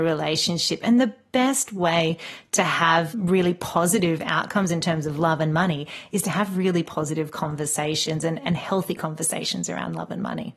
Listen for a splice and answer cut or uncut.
uncut